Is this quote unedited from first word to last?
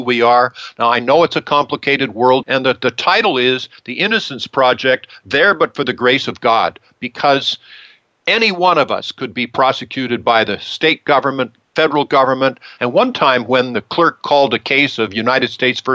no; 2 cuts; at 2.4 s, 12.8 s

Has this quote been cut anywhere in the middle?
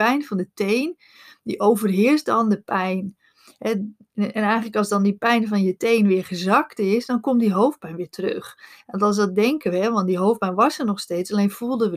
no; 0 cuts

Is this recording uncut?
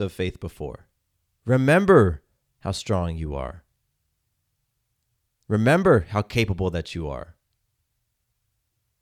no; 1 cut; at 1.3 s

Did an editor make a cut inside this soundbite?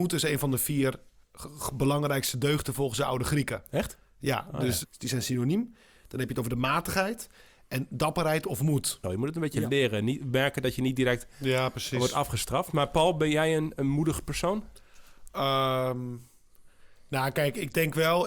yes; 2 cuts; at 4.8 s, 9.0 s

